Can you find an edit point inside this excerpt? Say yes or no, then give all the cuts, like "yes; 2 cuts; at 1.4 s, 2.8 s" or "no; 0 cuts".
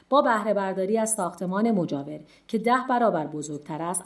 no; 0 cuts